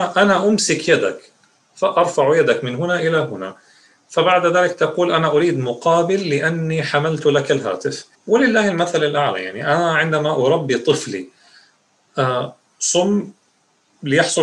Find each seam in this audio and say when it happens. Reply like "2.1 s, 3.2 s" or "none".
8.1 s